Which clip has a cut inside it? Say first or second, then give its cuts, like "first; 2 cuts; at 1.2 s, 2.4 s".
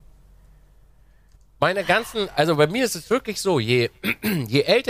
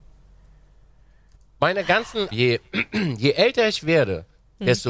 second; 1 cut; at 2.3 s